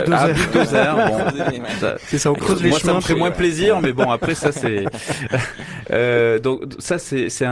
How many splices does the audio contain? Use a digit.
0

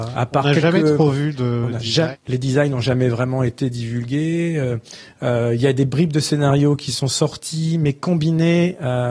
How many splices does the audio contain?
0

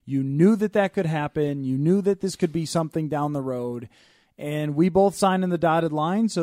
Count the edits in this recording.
0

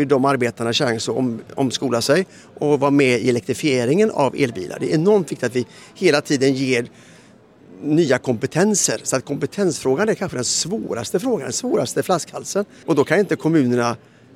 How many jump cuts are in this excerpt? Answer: 1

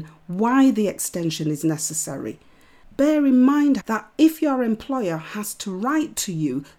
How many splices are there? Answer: 1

